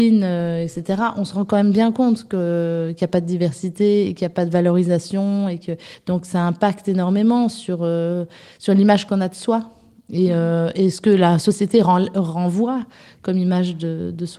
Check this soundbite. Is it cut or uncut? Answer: uncut